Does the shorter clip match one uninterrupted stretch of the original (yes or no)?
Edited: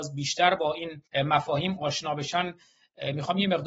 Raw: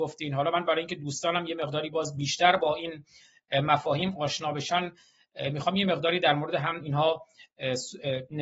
no